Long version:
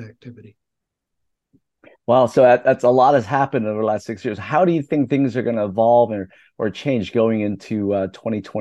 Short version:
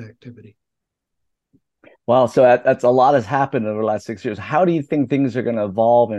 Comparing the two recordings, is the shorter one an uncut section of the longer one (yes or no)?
yes